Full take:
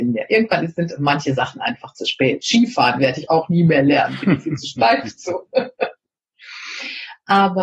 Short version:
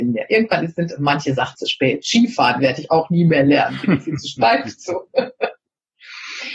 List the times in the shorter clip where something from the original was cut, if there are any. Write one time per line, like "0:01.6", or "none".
0:01.5